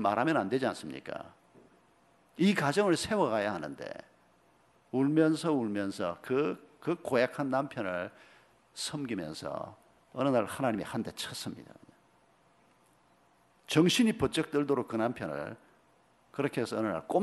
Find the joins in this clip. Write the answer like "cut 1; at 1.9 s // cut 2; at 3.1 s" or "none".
none

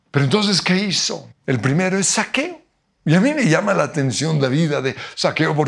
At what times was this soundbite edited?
cut 1; at 1.3 s

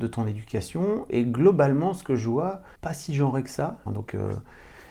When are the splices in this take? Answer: cut 1; at 2.8 s // cut 2; at 3.9 s

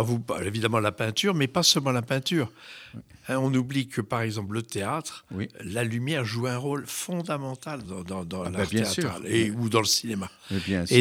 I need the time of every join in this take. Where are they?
cut 1; at 7.8 s

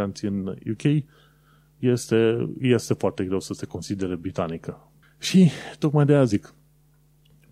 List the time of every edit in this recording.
cut 1; at 5.0 s

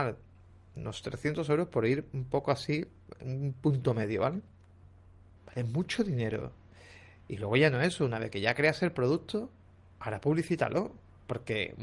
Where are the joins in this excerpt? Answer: cut 1; at 5.4 s

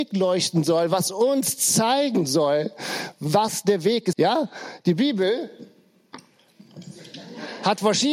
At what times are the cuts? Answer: cut 1; at 4.1 s

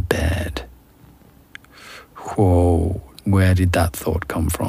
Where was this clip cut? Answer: cut 1; at 3.2 s

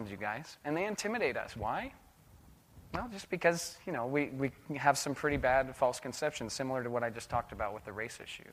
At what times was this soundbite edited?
none

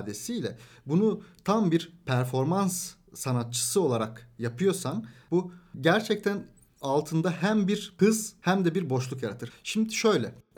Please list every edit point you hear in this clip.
cut 1; at 9.5 s

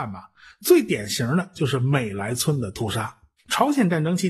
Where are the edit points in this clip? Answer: cut 1; at 3.4 s

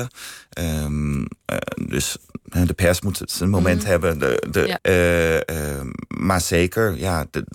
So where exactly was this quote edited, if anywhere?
cut 1; at 4.8 s

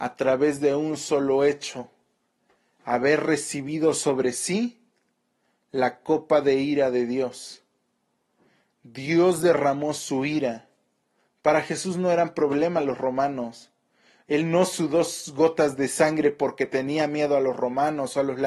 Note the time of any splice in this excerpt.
none

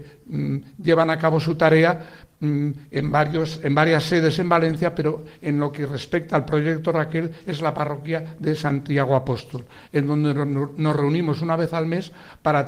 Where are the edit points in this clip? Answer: none

